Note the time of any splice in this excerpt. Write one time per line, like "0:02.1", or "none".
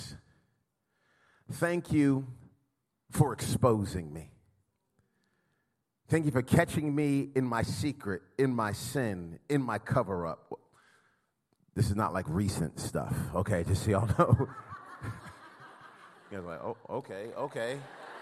none

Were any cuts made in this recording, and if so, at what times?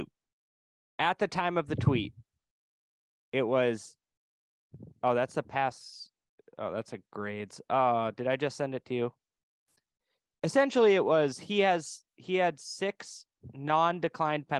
none

